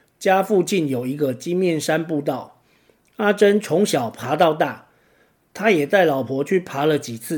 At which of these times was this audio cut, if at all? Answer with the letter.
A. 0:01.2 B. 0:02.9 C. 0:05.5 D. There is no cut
D